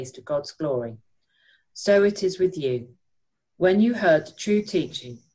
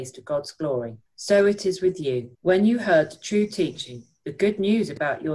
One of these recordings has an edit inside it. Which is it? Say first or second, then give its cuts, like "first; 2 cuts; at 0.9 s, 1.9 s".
second; 2 cuts; at 1.1 s, 2.3 s